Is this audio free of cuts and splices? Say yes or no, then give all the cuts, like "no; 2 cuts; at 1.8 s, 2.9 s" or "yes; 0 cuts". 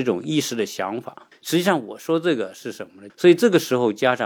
no; 2 cuts; at 1.3 s, 3.1 s